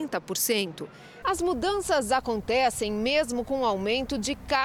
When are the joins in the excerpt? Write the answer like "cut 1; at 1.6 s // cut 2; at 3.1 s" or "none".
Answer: cut 1; at 1.2 s